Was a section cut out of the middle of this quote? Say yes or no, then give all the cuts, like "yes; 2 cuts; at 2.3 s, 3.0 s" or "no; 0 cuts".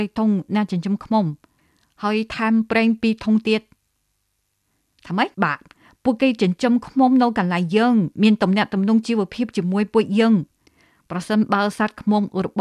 yes; 1 cut; at 5.3 s